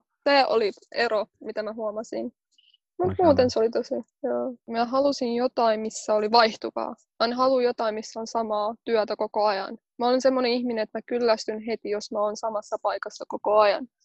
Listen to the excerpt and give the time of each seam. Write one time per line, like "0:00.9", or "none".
0:04.6